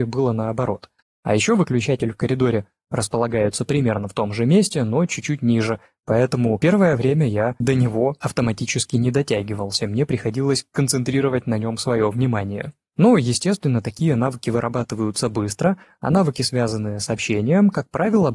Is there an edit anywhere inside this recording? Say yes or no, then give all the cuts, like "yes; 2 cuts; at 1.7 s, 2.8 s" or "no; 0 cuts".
no; 0 cuts